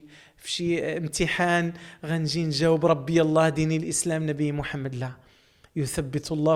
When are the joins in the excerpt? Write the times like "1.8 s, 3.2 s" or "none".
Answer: none